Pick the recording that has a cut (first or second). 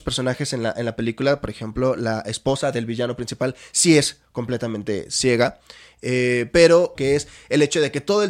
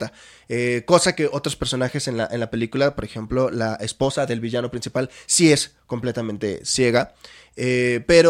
first